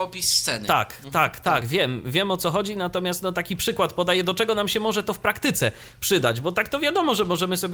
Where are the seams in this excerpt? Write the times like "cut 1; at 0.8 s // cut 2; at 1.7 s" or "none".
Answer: none